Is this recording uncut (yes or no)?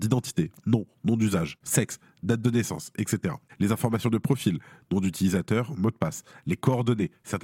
no